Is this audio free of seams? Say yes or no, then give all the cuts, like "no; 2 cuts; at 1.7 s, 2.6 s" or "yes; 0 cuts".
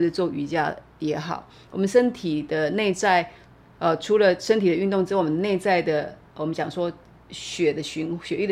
yes; 0 cuts